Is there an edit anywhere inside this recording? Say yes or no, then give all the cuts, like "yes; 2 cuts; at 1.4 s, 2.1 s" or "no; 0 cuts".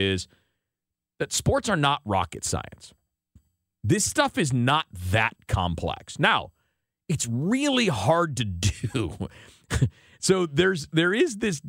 no; 0 cuts